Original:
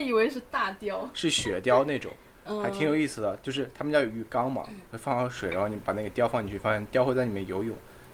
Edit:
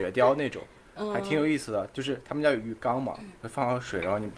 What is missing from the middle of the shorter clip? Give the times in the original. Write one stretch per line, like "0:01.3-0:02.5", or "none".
none